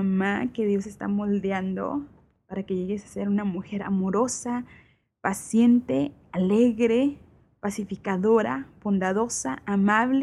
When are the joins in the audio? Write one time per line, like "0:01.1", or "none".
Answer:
none